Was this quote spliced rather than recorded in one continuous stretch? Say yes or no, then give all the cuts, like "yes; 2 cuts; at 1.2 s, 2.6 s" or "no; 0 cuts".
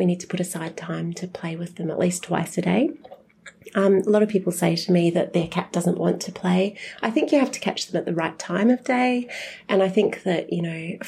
no; 0 cuts